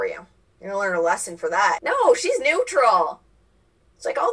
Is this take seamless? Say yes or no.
yes